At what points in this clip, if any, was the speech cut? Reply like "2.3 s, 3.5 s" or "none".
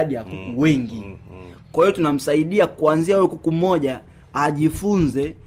none